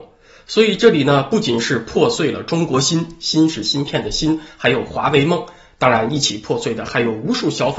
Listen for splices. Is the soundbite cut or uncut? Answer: uncut